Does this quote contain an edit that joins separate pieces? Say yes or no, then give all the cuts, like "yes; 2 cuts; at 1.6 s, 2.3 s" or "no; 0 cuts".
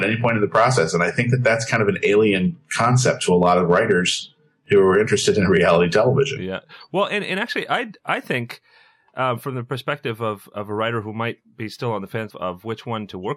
yes; 1 cut; at 12.3 s